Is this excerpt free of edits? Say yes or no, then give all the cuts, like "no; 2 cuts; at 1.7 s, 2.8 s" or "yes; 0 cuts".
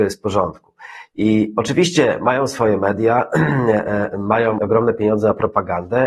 no; 1 cut; at 4.6 s